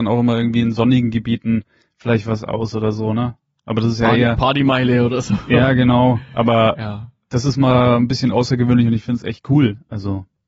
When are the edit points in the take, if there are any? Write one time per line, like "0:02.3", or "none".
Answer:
none